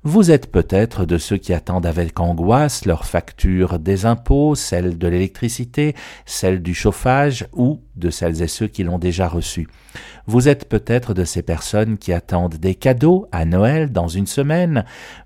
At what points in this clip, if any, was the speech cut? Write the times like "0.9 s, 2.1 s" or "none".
none